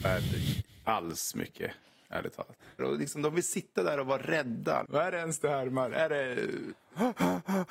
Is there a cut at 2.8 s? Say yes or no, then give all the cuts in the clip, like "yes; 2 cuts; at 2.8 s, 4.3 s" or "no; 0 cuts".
yes; 2 cuts; at 2.8 s, 4.8 s